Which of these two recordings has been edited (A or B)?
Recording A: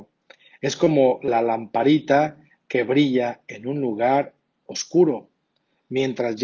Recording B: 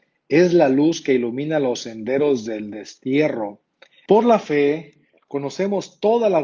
B